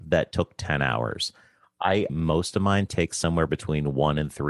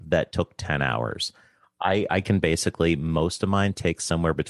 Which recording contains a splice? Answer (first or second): first